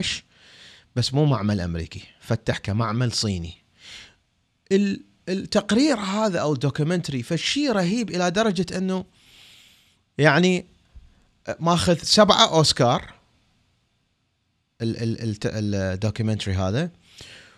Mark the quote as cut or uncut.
uncut